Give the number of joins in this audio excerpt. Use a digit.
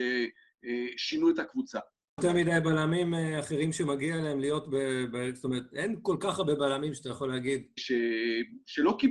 2